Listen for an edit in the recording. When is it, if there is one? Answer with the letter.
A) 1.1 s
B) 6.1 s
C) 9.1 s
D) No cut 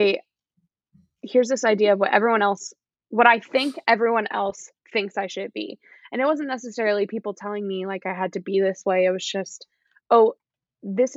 D